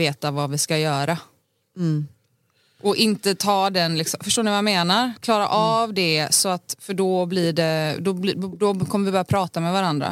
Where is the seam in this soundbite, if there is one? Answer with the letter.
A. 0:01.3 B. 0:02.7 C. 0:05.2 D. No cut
C